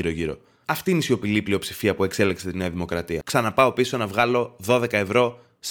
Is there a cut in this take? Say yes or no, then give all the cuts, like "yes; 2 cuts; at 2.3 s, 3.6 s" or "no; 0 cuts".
yes; 1 cut; at 3.2 s